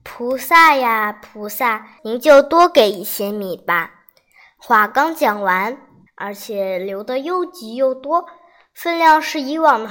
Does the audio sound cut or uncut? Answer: cut